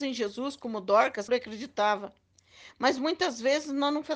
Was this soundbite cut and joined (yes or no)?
yes